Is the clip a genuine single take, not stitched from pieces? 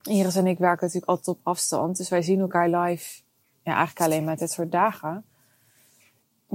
yes; 0 cuts

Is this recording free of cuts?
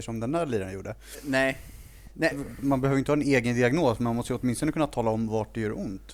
no; 1 cut; at 2.3 s

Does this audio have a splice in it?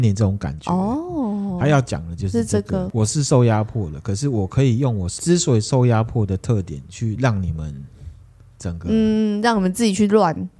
no; 0 cuts

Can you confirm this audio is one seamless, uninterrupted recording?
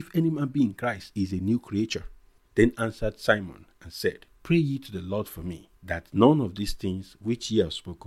no; 3 cuts; at 2.4 s, 4.4 s, 5.8 s

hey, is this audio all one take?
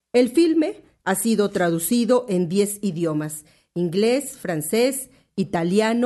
yes; 0 cuts

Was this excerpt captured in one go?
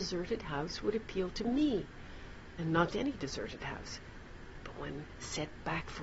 no; 1 cut; at 2.9 s

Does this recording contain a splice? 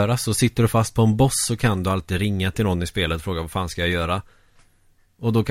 no; 0 cuts

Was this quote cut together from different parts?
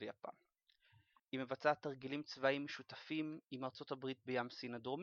yes; 1 cut; at 1.2 s

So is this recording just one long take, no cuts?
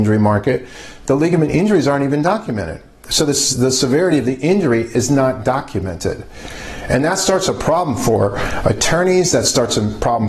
no; 1 cut; at 3.5 s

